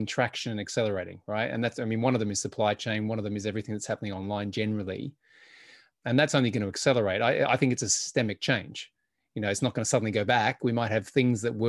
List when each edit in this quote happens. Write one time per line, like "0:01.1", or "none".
0:05.9

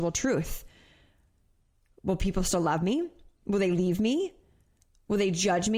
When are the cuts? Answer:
none

